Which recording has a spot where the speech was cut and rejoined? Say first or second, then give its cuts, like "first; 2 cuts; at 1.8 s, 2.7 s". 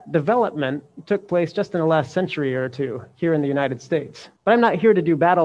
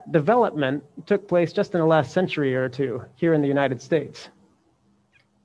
first; 1 cut; at 4.4 s